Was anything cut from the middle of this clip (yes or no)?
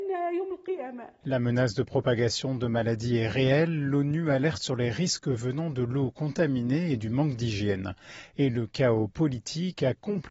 yes